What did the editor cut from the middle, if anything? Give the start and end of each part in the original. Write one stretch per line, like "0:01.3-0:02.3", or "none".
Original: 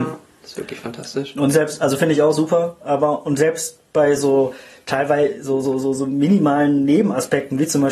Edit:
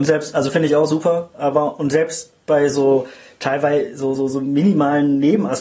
0:05.6-0:05.8